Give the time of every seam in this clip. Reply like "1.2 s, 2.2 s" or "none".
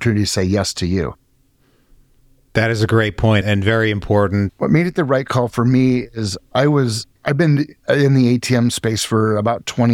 3.4 s, 4.5 s, 7.2 s

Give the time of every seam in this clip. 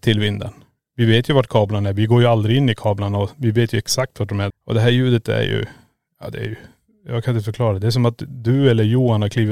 4.5 s

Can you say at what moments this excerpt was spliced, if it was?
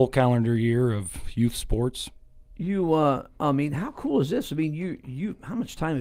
none

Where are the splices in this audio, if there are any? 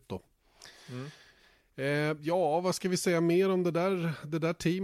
none

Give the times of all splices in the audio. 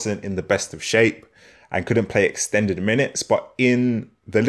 none

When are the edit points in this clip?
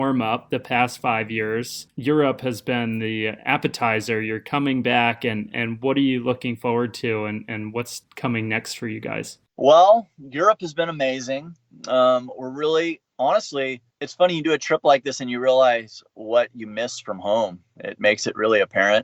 1.9 s

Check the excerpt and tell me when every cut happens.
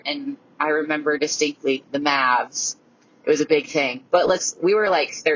4.1 s

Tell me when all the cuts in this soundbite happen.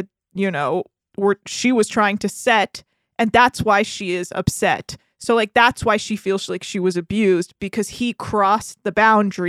none

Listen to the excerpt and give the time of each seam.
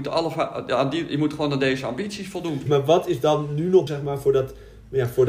2.7 s, 3.9 s

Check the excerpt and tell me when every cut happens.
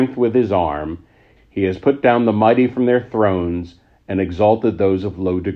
1.4 s

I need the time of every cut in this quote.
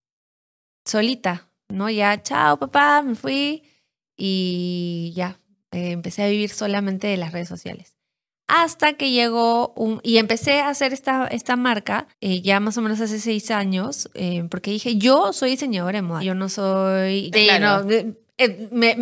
12.1 s, 16.2 s, 17.3 s

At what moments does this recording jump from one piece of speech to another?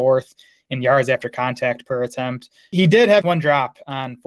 3.2 s

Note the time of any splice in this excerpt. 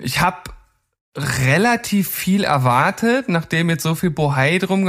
none

